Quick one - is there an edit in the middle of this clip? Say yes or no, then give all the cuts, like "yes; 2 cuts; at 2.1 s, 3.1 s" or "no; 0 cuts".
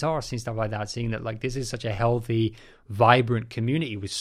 no; 0 cuts